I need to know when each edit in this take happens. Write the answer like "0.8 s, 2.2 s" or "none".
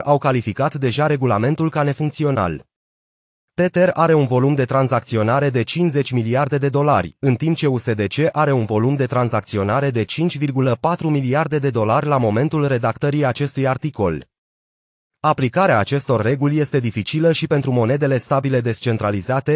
none